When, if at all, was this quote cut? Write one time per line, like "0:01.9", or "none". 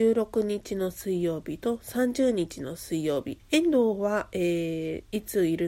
0:03.4